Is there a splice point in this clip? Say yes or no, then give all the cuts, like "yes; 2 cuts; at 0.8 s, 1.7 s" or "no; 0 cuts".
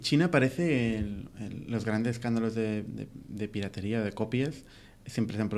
yes; 1 cut; at 1.3 s